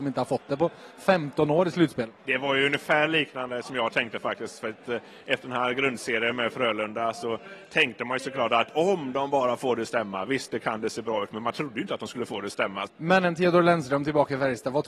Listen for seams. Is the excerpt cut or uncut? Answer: cut